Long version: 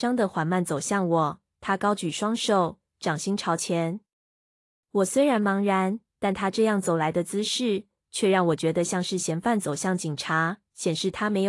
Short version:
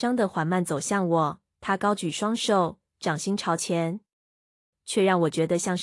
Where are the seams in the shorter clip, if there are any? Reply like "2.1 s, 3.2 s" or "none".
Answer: 4.7 s